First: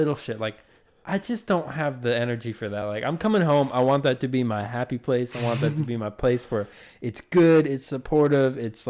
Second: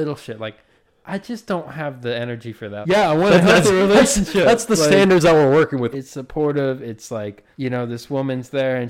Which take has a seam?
second; 3 cuts; at 2.8 s, 5.9 s, 7.5 s

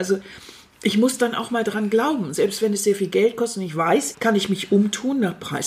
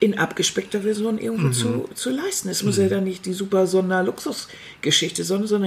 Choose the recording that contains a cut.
first; 1 cut; at 4.1 s

